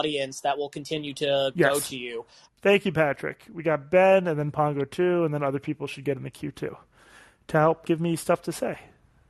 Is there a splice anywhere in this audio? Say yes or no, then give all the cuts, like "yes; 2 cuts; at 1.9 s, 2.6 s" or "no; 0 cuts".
yes; 2 cuts; at 2.5 s, 7.8 s